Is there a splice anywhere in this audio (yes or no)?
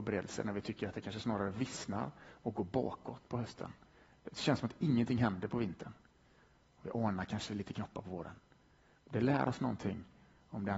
no